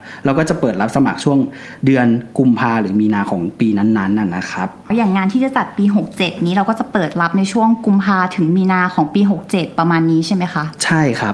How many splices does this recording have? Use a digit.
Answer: 1